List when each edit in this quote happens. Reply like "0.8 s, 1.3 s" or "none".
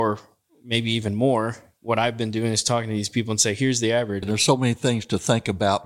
4.2 s